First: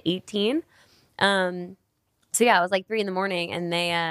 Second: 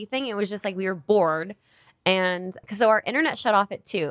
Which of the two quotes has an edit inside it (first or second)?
second